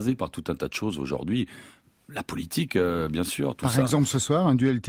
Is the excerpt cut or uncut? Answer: uncut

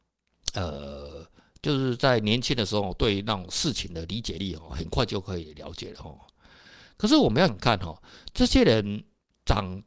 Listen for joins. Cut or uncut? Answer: cut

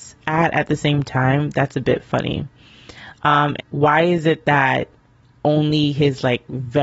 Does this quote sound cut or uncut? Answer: cut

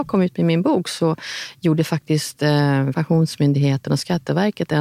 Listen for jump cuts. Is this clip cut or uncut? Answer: cut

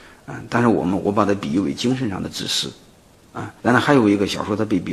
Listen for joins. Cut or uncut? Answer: cut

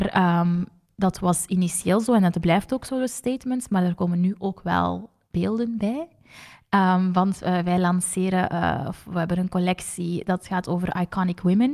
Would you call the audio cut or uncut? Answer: uncut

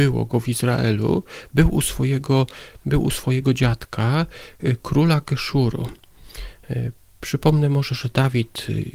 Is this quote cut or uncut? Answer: cut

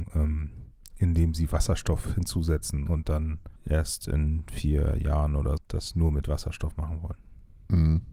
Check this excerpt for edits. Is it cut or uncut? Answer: cut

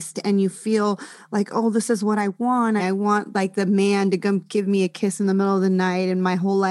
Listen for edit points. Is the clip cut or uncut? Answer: cut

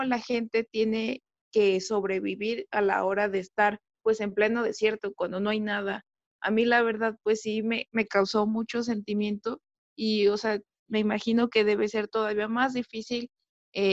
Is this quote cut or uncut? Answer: uncut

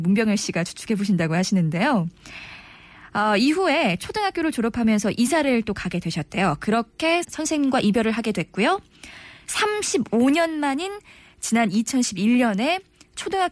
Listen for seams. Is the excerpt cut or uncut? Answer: cut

